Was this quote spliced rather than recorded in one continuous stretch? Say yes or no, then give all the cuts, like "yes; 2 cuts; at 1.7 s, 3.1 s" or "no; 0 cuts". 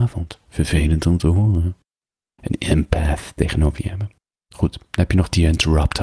yes; 1 cut; at 2.4 s